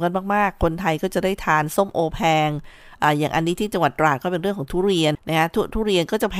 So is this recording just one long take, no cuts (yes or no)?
no